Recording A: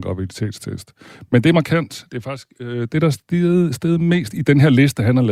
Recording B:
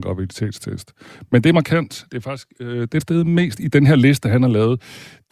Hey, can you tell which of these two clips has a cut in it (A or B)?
B